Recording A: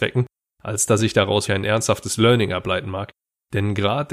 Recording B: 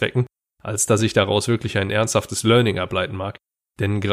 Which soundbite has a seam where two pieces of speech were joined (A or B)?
A